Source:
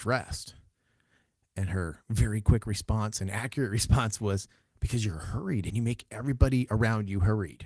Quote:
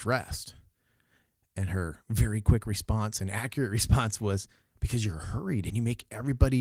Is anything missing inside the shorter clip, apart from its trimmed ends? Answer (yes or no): no